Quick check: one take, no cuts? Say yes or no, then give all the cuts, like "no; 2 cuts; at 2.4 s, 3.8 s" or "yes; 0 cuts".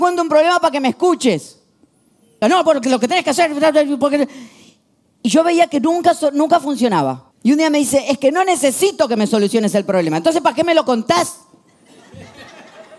no; 2 cuts; at 2.4 s, 7.3 s